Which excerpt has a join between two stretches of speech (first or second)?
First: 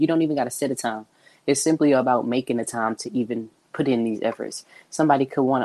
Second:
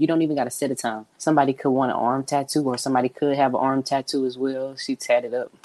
second